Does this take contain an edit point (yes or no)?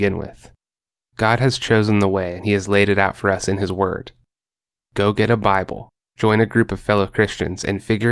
no